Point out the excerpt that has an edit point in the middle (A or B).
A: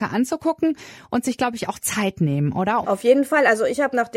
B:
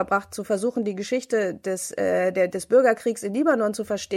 A